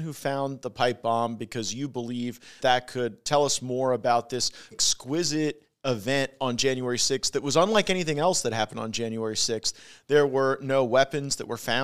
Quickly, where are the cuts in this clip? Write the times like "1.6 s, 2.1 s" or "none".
2.6 s, 4.7 s